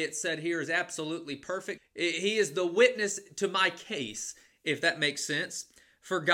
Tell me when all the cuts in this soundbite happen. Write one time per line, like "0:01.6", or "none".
0:01.8